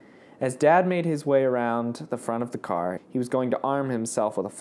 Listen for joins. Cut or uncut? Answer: cut